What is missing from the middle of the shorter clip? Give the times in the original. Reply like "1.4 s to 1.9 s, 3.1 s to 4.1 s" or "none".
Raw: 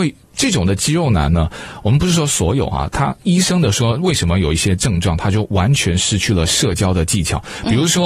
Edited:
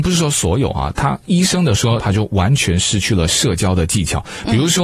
4.0 s to 5.2 s